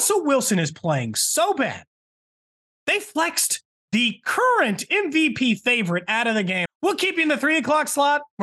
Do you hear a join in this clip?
yes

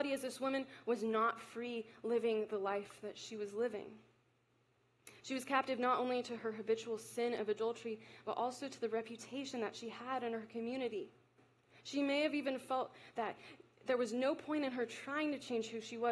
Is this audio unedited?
yes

